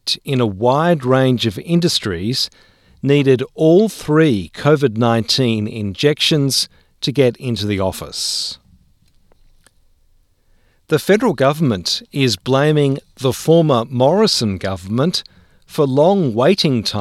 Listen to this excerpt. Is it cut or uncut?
uncut